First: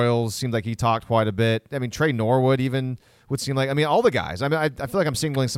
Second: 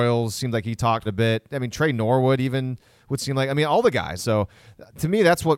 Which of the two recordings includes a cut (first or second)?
second